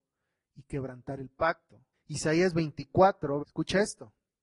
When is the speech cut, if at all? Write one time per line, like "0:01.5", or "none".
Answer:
0:01.9
0:03.4